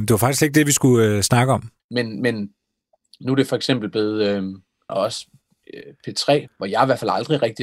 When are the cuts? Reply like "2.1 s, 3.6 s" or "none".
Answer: 1.8 s, 4.9 s, 6.5 s